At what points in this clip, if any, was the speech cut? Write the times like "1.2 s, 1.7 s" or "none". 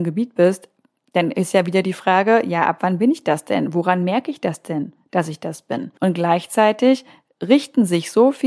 6.0 s